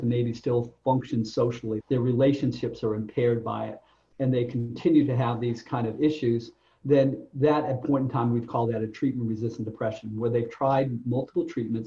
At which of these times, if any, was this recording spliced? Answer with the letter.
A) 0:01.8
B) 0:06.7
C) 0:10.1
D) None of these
A